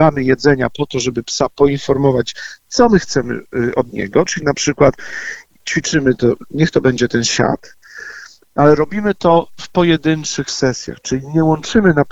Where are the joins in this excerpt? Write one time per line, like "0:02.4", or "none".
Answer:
none